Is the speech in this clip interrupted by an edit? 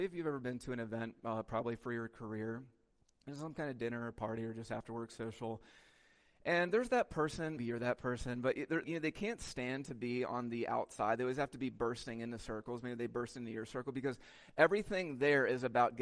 yes; 2 cuts; at 7.6 s, 8.8 s

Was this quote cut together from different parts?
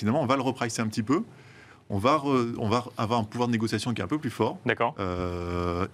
no; 0 cuts

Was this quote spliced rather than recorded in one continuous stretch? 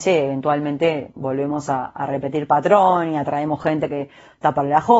no; 0 cuts

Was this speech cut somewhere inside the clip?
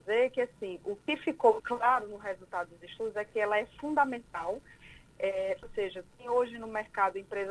yes; 2 cuts; at 1.6 s, 5.6 s

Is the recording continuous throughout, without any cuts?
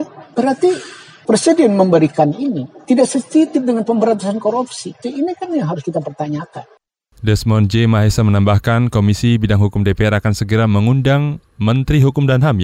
no; 1 cut; at 5.0 s

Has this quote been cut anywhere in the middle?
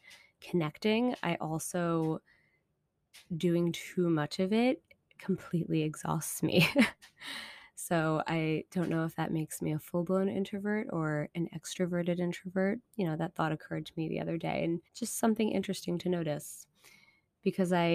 yes; 2 cuts; at 12.9 s, 14.9 s

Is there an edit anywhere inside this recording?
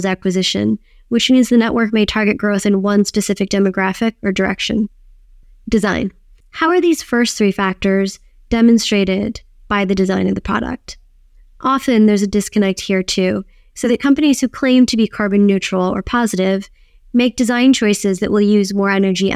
no; 0 cuts

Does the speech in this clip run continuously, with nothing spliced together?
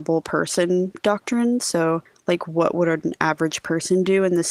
yes; 0 cuts

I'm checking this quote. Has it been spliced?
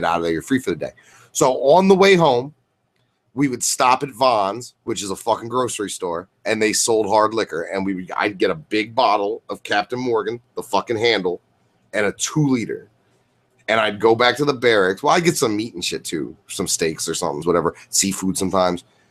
yes; 1 cut; at 17.4 s

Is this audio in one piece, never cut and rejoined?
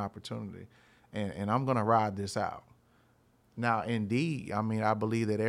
yes; 0 cuts

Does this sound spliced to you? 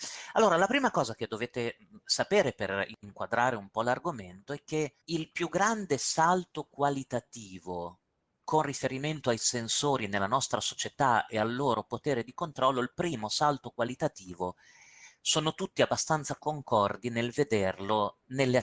yes; 1 cut; at 5.0 s

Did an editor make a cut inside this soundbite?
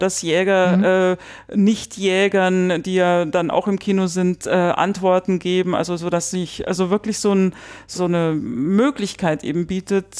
yes; 1 cut; at 7.9 s

